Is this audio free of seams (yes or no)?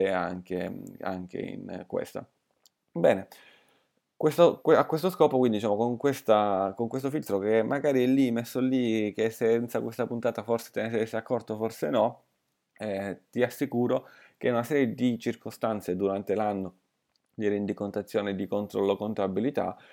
yes